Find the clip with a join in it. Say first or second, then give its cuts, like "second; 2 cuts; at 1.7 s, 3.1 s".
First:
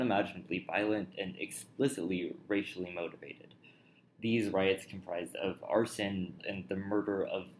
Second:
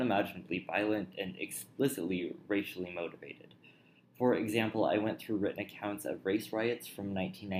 first; 2 cuts; at 4.1 s, 6.4 s